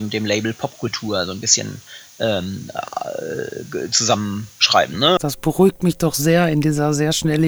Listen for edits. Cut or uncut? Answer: cut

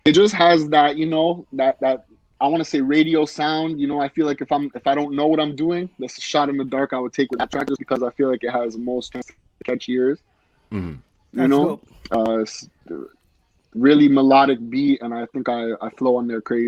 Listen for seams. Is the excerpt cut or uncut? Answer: uncut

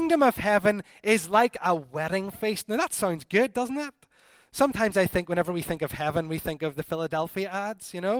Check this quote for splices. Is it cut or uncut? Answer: uncut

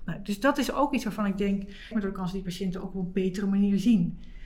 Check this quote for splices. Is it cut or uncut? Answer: cut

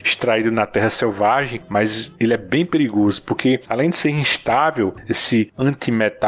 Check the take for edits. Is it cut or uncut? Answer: uncut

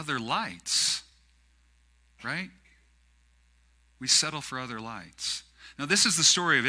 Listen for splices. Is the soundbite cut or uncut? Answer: uncut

